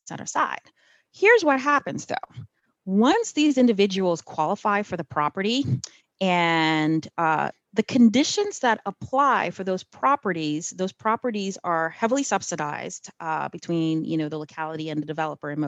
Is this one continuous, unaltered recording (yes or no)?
no